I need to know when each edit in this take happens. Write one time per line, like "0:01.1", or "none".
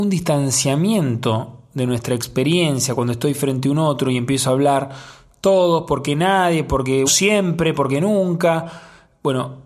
0:07.1